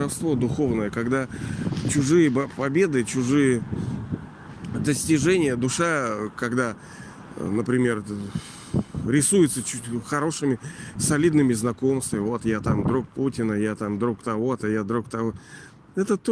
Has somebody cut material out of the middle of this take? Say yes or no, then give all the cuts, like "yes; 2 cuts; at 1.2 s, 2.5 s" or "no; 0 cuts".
no; 0 cuts